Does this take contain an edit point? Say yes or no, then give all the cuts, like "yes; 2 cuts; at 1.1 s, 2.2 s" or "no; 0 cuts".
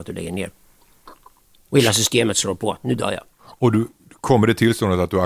yes; 1 cut; at 3.3 s